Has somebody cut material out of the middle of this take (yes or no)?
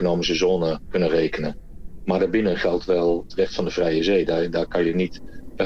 no